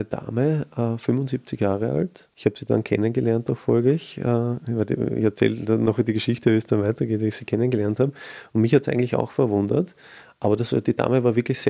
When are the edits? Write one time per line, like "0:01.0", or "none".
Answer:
0:02.3